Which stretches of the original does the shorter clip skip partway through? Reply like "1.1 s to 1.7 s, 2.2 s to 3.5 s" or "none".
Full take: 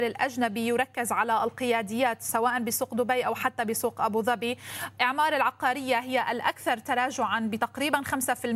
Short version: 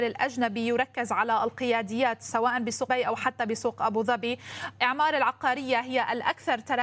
2.9 s to 3.1 s